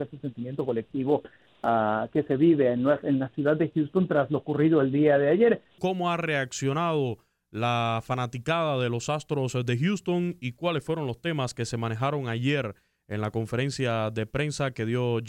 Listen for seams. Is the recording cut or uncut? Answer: cut